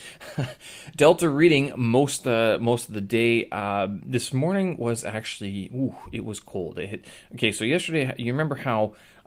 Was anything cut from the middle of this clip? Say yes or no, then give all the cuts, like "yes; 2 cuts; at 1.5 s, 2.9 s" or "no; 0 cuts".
no; 0 cuts